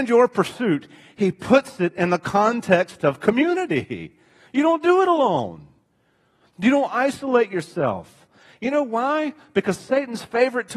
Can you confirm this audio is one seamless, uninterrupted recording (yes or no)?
yes